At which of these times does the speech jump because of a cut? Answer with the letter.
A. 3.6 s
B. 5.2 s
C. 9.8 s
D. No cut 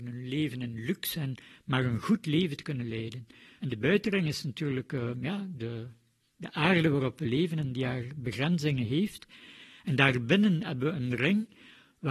A